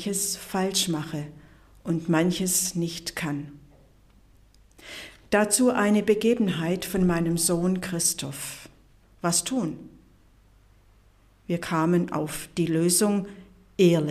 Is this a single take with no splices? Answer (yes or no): no